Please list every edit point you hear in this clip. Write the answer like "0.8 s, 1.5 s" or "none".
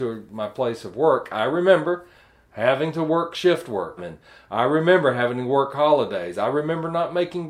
4.0 s

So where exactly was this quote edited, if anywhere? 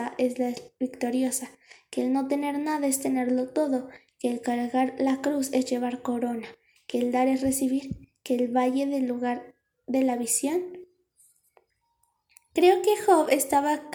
none

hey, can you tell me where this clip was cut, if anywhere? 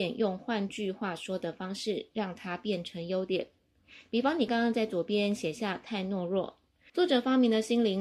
4.5 s, 6.9 s

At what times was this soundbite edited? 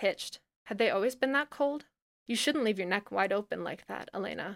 none

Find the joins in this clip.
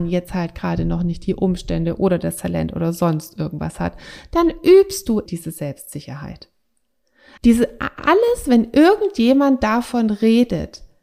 5.3 s, 7.4 s

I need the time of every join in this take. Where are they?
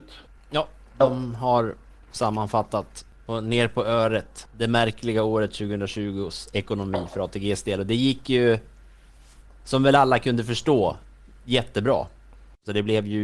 none

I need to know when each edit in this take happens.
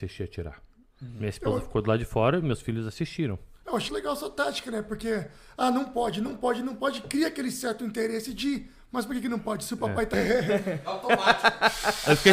3.9 s, 10.1 s

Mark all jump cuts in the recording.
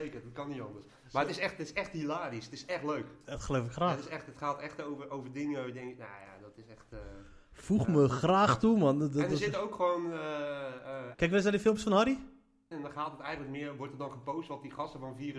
11.1 s, 12.7 s

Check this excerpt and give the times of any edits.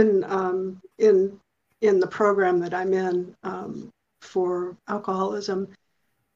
0.9 s, 4.8 s

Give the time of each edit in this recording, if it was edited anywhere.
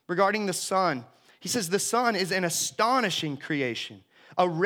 none

